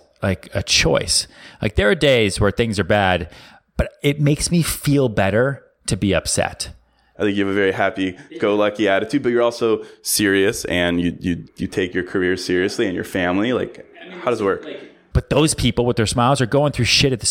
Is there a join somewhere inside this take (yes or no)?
yes